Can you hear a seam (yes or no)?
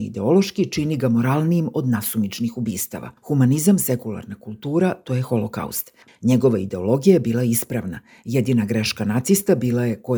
yes